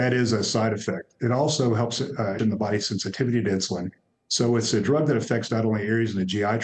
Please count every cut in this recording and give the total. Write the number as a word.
one